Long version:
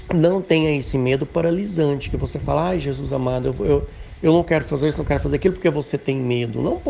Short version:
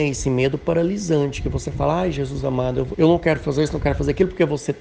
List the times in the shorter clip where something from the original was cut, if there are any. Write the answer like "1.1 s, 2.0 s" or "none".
2.9 s